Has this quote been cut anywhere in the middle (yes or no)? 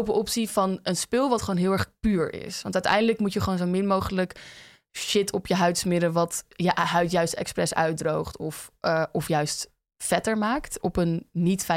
no